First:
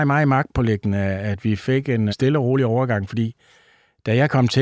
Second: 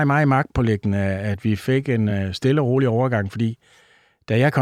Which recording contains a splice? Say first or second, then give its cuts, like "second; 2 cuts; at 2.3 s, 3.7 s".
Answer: first; 1 cut; at 2.1 s